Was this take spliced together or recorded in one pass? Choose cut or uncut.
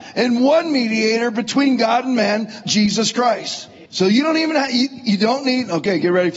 cut